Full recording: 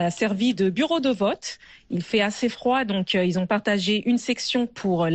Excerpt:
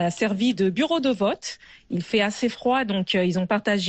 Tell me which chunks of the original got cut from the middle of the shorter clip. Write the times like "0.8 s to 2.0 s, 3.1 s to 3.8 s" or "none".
none